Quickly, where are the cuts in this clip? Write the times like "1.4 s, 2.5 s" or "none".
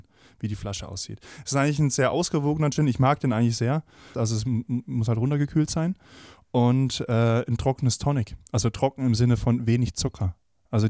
4.1 s